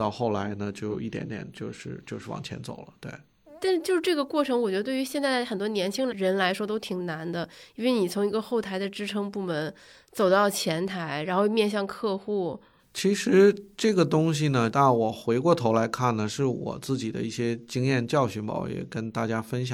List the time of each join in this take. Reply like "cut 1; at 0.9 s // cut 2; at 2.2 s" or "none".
cut 1; at 6.1 s // cut 2; at 14.7 s